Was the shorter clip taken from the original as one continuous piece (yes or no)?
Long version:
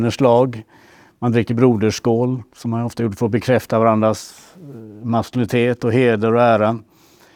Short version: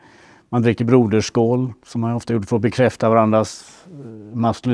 yes